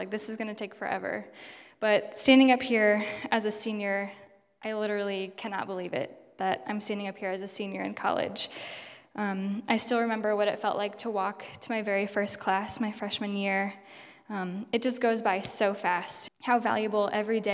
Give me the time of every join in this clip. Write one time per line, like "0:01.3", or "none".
0:16.3

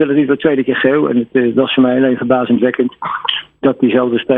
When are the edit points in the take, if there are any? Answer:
none

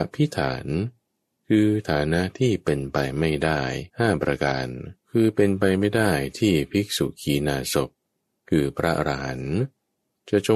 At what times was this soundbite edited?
0:03.9
0:05.0

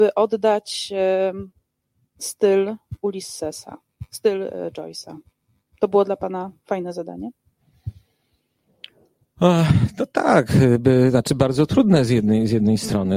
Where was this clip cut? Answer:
none

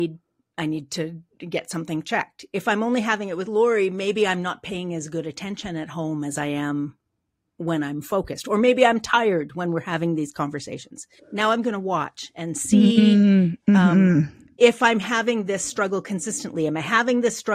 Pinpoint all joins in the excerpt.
0:11.2

